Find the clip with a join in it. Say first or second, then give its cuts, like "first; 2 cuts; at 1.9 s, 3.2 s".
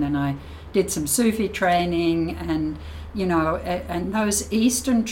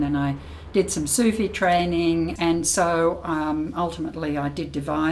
second; 1 cut; at 2.4 s